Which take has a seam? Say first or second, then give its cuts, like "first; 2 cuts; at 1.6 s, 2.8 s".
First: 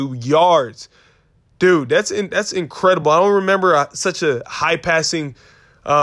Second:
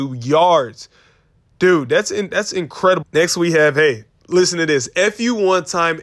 second; 1 cut; at 3.0 s